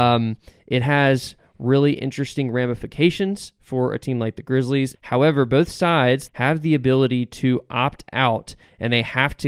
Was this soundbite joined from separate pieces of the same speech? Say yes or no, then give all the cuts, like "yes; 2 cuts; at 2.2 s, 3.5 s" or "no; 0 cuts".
yes; 2 cuts; at 4.9 s, 6.3 s